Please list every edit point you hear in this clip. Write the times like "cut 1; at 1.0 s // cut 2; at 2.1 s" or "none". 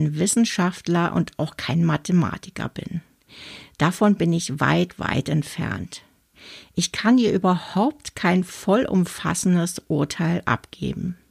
cut 1; at 5.0 s

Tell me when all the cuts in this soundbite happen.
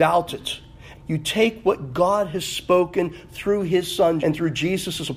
cut 1; at 0.9 s // cut 2; at 4.2 s

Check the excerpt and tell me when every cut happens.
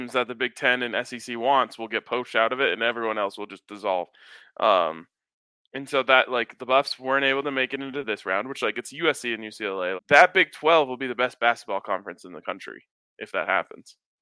cut 1; at 10.0 s

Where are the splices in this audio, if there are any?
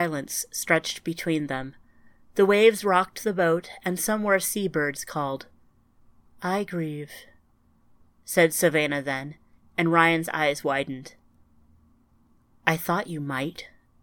none

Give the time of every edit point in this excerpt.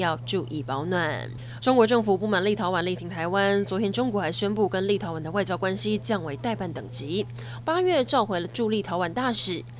cut 1; at 1.6 s // cut 2; at 7.6 s

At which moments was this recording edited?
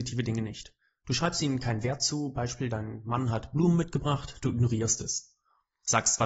none

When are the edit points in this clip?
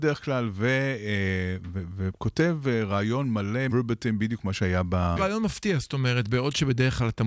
cut 1; at 3.7 s // cut 2; at 5.2 s

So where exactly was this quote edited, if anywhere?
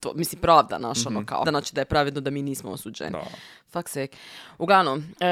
cut 1; at 1.4 s

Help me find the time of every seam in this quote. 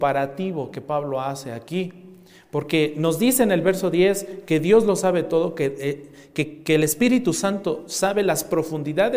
none

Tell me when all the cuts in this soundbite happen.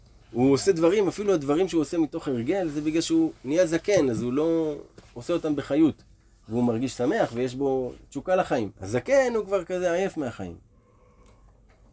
cut 1; at 6.4 s // cut 2; at 8.7 s

